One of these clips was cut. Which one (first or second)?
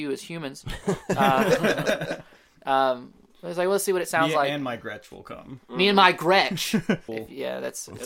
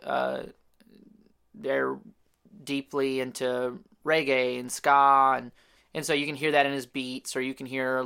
first